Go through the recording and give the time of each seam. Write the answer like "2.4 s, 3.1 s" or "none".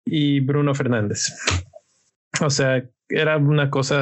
none